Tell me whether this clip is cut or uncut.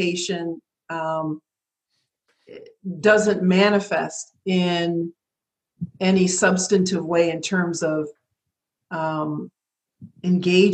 uncut